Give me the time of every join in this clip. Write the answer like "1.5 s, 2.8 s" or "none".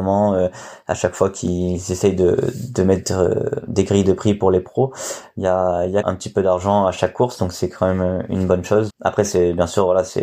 6.0 s, 8.9 s